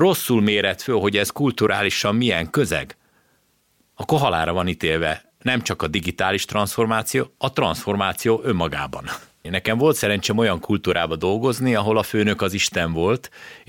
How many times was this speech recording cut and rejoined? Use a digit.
1